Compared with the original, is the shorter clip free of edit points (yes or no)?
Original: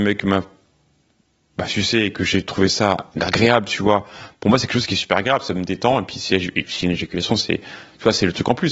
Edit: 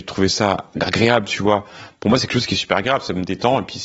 yes